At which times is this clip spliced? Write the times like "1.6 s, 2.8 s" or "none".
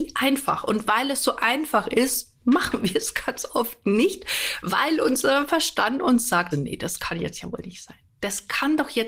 6.5 s